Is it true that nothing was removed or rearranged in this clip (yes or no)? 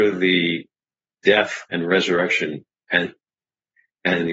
yes